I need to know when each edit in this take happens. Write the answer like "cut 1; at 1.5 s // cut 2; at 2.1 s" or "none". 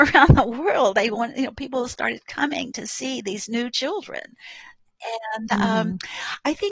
none